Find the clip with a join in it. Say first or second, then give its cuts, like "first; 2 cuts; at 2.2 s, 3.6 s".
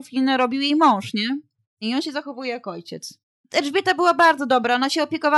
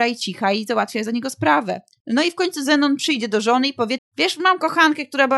second; 2 cuts; at 2.0 s, 4.0 s